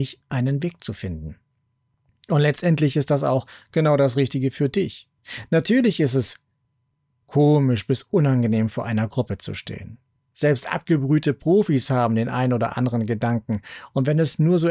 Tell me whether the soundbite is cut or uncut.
uncut